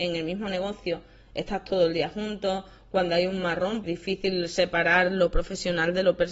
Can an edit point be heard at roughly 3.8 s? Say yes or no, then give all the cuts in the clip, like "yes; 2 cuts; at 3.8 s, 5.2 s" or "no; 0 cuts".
yes; 1 cut; at 3.8 s